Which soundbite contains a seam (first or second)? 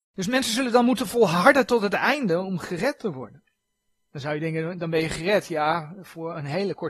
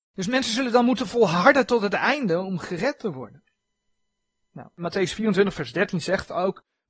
first